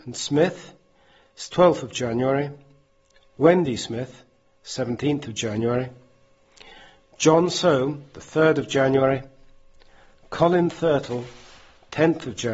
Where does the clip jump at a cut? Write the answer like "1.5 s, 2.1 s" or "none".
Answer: none